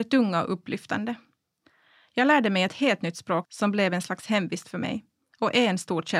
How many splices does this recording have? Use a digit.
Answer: 1